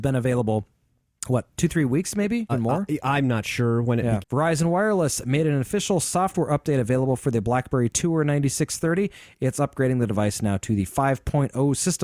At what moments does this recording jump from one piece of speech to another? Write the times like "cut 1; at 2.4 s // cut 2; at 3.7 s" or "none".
cut 1; at 2.5 s // cut 2; at 4.2 s